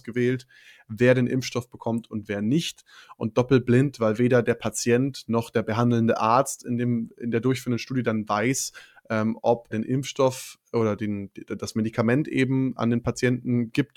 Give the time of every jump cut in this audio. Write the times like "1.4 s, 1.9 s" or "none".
9.7 s